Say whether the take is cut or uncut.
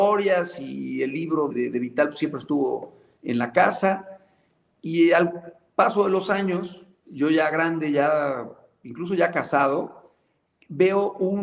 cut